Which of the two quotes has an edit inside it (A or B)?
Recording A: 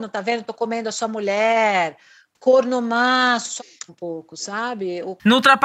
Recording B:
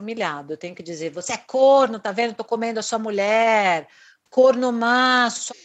A